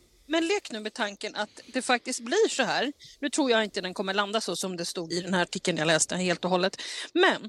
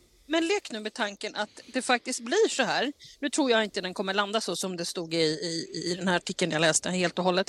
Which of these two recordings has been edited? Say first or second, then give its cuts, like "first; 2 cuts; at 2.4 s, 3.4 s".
first; 1 cut; at 5.1 s